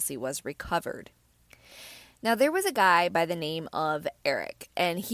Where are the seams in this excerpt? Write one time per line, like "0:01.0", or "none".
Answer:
none